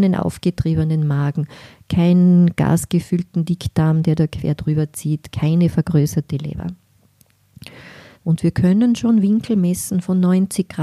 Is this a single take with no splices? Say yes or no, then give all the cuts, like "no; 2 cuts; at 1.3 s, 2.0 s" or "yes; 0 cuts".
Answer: no; 2 cuts; at 5.3 s, 8.1 s